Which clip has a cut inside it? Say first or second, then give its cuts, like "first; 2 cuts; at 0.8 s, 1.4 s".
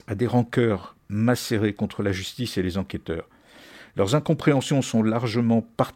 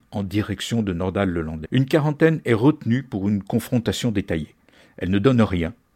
second; 1 cut; at 1.6 s